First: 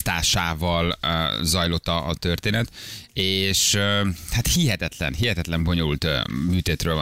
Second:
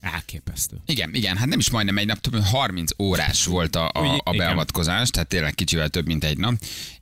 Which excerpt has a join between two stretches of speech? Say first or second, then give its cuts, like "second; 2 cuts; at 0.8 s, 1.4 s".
second; 1 cut; at 4.2 s